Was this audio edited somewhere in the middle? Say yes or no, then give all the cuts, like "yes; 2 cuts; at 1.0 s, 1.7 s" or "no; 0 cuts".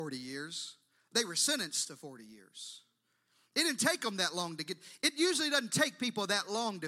no; 0 cuts